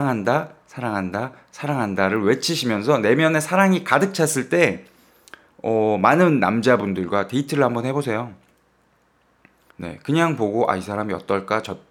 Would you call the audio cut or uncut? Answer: cut